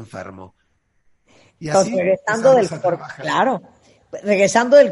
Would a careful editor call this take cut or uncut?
uncut